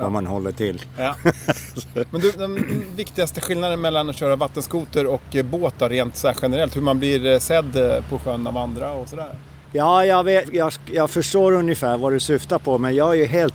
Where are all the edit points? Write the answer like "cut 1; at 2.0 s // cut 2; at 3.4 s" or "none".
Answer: cut 1; at 10.4 s